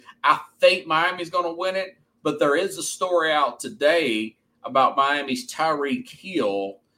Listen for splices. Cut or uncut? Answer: uncut